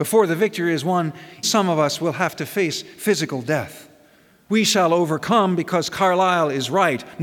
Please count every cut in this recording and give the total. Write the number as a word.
two